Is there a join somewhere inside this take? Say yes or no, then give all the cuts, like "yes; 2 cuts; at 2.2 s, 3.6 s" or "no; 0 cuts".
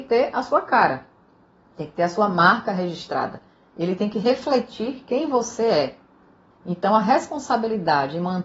yes; 1 cut; at 6.5 s